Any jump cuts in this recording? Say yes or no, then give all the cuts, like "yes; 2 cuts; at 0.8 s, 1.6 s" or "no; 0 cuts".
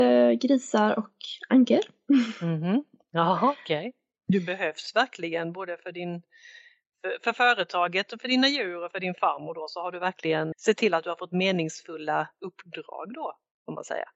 yes; 2 cuts; at 4.2 s, 10.5 s